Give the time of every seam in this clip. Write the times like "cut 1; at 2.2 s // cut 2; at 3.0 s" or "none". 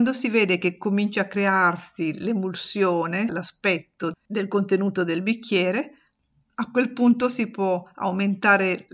cut 1; at 3.3 s

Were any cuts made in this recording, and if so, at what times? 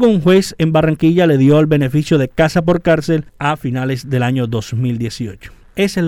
cut 1; at 3.3 s

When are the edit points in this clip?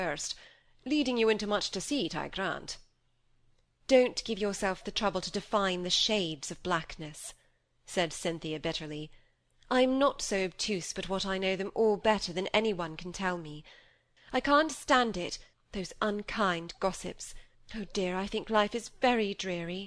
cut 1; at 14.2 s // cut 2; at 15.5 s // cut 3; at 17.5 s

